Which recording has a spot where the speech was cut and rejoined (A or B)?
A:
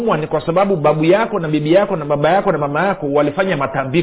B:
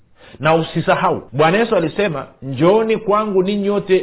B